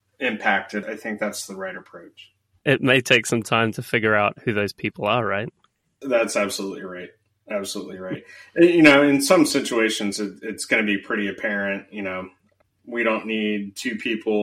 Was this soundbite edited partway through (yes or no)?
yes